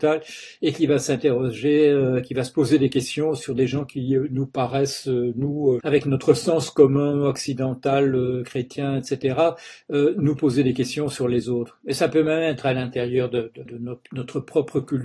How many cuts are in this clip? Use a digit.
2